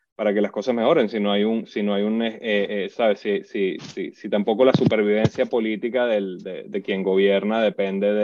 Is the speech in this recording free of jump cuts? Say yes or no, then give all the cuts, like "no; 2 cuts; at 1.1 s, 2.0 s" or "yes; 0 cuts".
yes; 0 cuts